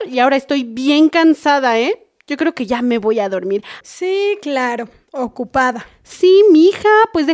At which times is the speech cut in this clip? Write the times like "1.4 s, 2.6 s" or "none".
3.8 s